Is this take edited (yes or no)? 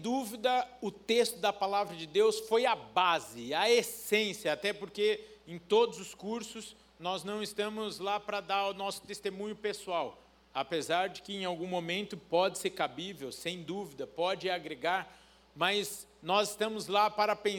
no